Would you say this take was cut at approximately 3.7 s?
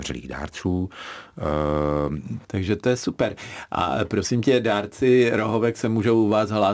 no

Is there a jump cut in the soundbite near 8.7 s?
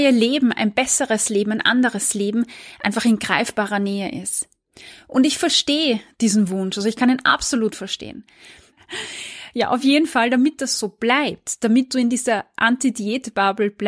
yes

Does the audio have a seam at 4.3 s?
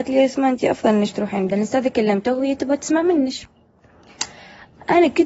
no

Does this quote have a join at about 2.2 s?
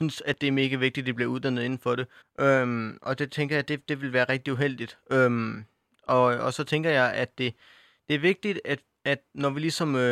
yes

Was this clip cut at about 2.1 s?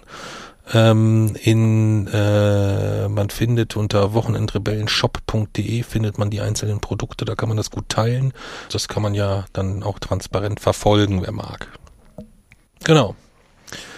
no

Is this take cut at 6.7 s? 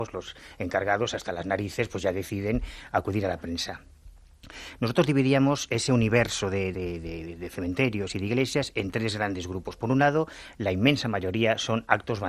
yes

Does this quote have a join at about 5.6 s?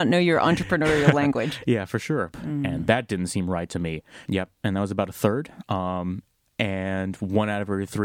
no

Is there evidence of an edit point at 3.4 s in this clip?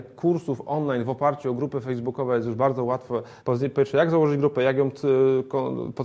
yes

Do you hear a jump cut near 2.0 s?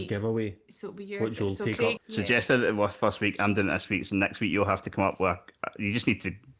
yes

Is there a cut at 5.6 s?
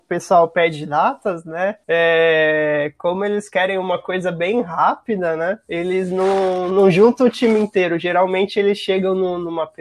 no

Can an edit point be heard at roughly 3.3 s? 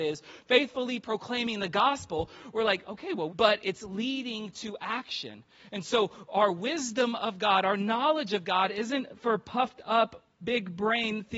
yes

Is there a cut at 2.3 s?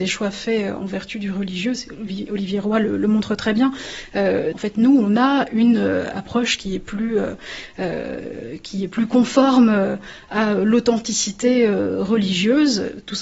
no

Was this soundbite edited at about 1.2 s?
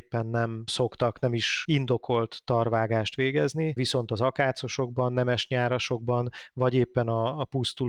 no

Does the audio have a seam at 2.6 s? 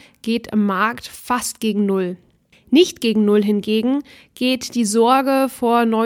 no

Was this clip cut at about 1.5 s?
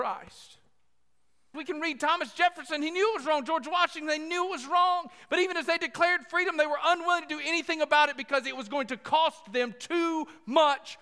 yes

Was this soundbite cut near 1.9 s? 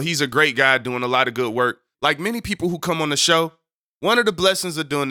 yes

